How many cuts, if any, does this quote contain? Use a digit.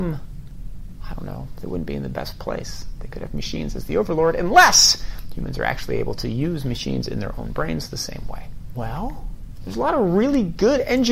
1